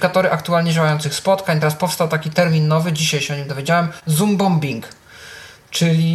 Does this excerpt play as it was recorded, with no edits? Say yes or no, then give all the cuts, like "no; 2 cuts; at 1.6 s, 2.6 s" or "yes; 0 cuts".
yes; 0 cuts